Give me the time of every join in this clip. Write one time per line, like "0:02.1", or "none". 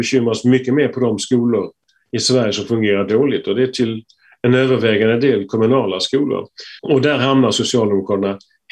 0:06.8